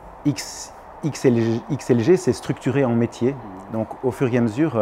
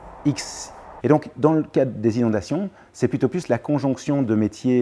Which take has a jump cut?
second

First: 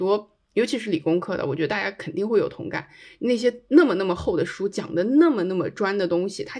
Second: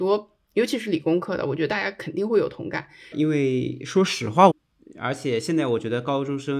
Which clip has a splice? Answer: second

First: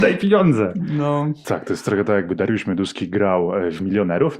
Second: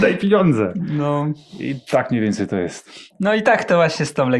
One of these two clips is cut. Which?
first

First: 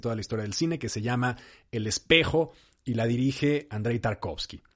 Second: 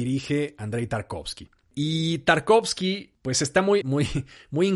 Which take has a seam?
second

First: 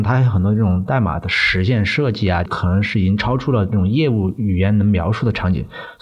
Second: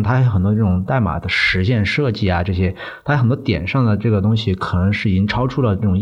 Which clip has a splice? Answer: first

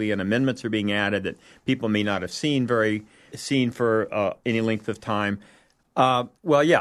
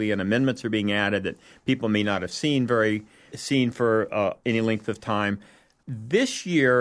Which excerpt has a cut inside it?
first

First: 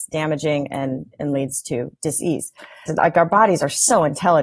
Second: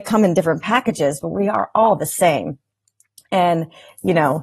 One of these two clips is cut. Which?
first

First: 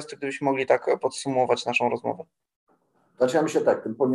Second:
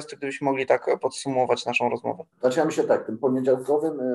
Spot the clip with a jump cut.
second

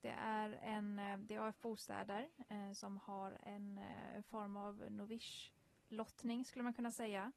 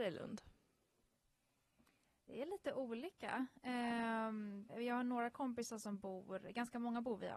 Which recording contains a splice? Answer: second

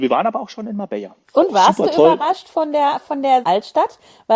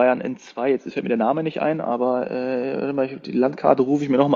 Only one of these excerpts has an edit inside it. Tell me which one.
first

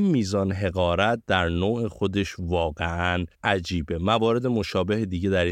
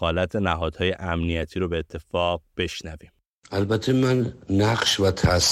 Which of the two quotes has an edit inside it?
first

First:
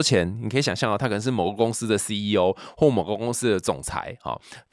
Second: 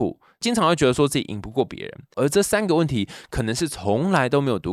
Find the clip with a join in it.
second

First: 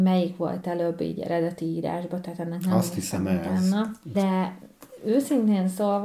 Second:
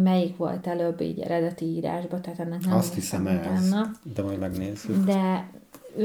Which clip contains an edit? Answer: first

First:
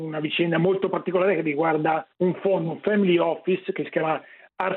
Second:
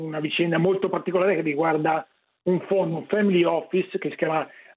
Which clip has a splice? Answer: first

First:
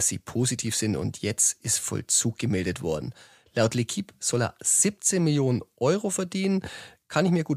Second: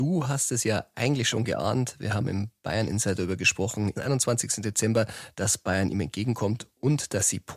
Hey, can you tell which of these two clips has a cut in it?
second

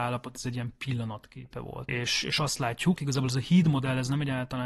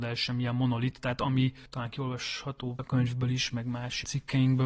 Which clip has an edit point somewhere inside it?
first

